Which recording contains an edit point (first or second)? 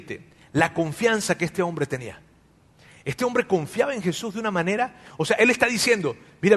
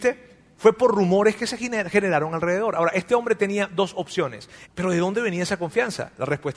second